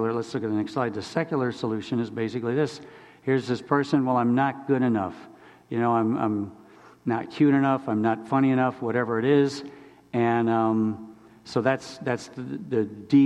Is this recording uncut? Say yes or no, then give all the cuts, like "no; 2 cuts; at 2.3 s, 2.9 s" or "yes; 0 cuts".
yes; 0 cuts